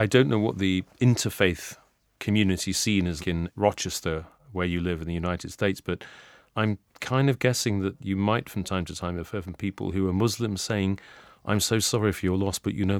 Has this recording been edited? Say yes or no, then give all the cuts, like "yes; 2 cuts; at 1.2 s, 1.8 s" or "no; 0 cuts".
yes; 1 cut; at 3.2 s